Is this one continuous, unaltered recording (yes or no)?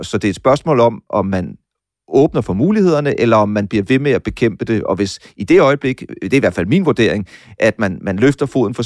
yes